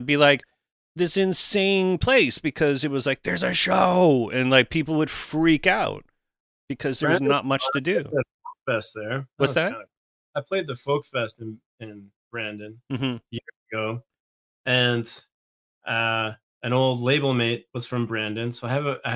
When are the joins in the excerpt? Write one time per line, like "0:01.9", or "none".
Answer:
none